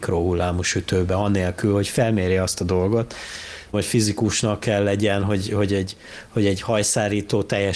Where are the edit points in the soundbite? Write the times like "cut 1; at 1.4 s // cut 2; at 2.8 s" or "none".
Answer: cut 1; at 3.7 s